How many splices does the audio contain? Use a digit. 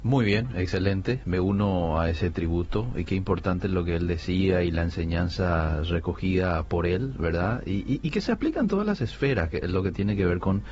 0